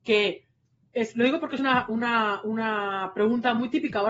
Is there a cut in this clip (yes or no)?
no